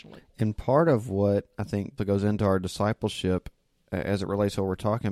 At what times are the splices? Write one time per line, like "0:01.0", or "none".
0:02.0